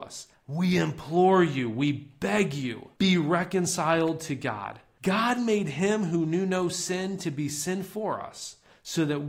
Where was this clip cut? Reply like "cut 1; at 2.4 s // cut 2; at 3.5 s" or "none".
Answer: cut 1; at 2.9 s